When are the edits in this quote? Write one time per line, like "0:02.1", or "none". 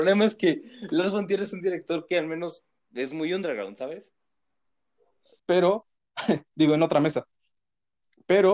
0:05.4